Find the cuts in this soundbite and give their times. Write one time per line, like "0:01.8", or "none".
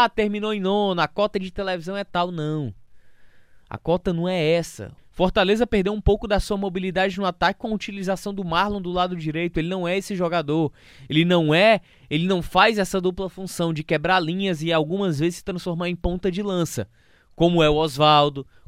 0:05.0